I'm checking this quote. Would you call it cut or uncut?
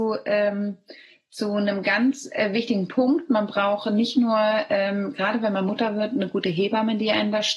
uncut